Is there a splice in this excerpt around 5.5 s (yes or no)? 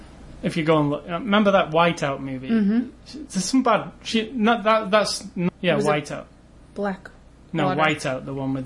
yes